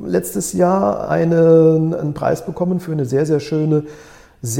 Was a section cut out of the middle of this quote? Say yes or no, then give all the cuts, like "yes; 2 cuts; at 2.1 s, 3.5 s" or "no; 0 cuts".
no; 0 cuts